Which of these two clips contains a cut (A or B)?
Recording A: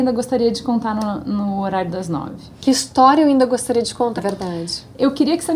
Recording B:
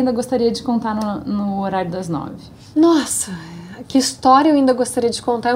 A